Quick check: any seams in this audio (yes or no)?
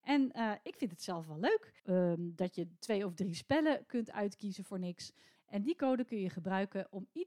yes